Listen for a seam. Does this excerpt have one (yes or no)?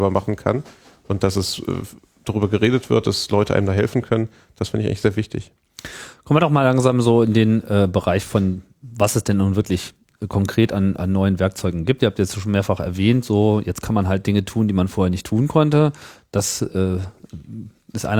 no